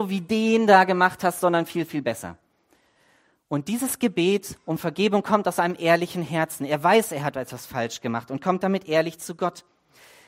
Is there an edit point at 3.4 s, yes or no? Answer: yes